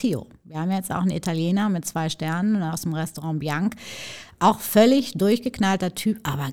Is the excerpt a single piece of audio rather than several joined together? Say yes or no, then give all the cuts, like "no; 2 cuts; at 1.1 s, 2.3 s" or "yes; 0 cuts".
yes; 0 cuts